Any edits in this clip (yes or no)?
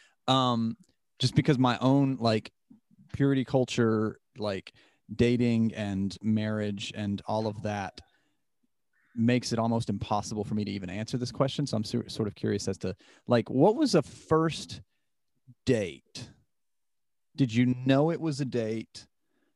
no